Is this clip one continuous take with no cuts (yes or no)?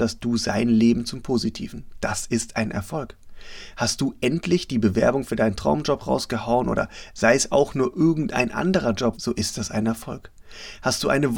no